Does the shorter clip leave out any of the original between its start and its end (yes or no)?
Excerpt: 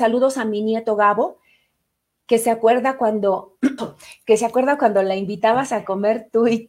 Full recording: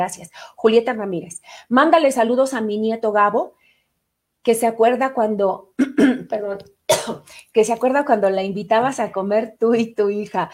yes